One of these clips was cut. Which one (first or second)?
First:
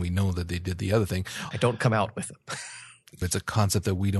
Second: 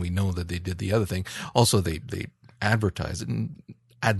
first